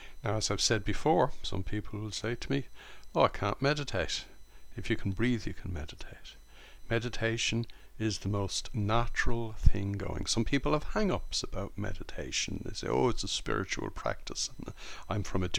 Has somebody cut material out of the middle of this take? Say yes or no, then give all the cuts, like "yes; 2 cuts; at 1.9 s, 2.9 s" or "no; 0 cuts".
no; 0 cuts